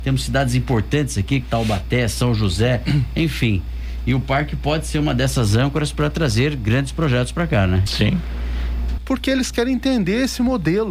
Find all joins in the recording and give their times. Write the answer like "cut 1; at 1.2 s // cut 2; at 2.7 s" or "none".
cut 1; at 1.4 s // cut 2; at 7.9 s // cut 3; at 9.0 s